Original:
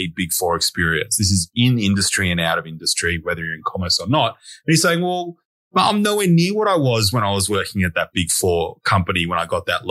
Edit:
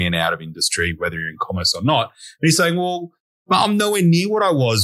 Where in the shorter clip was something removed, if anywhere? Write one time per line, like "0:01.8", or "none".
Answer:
none